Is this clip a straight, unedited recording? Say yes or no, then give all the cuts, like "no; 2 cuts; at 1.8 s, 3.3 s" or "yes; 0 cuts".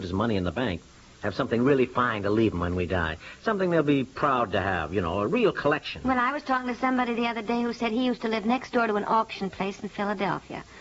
yes; 0 cuts